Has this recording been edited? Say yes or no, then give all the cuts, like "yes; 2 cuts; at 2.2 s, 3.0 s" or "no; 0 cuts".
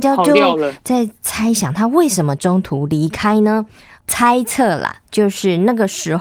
no; 0 cuts